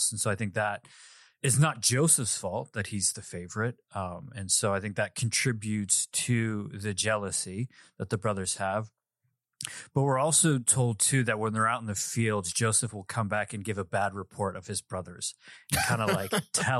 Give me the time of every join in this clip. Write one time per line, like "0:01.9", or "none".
none